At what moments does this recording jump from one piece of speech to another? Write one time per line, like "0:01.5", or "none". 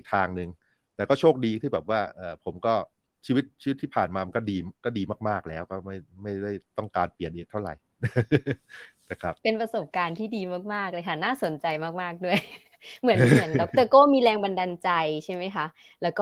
0:09.4